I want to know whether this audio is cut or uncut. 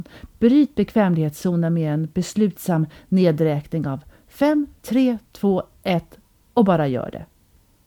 cut